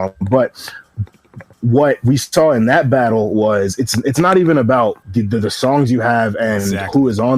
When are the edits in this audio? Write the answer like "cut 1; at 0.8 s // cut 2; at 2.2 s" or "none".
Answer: cut 1; at 5.0 s